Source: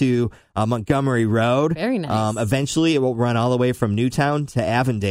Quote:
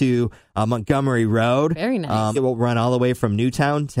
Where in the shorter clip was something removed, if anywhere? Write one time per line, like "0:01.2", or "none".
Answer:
0:02.3